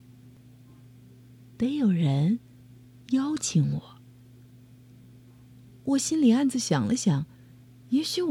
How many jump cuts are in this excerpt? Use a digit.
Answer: 0